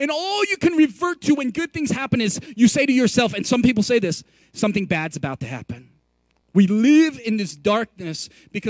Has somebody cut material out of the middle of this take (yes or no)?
no